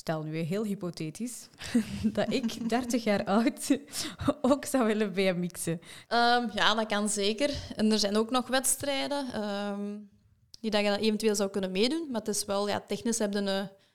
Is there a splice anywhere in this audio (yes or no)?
yes